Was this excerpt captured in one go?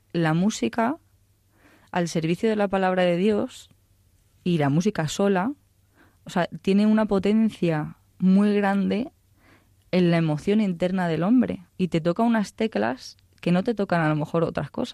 no; 1 cut; at 11.7 s

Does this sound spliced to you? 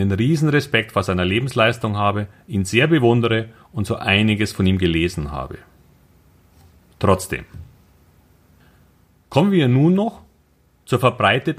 no; 0 cuts

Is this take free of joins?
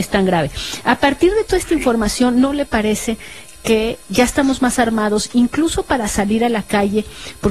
no; 1 cut; at 4.0 s

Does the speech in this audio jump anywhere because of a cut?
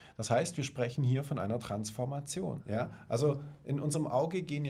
yes; 1 cut; at 2.6 s

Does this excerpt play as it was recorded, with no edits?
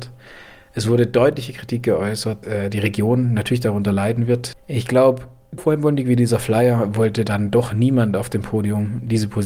no; 3 cuts; at 2.4 s, 4.5 s, 5.6 s

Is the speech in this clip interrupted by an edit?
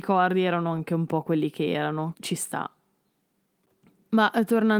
yes; 1 cut; at 2.1 s

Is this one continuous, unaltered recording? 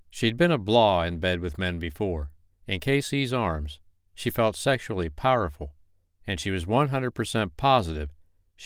no; 2 cuts; at 2.5 s, 6.1 s

